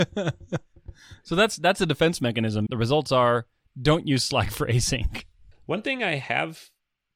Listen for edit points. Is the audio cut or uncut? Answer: cut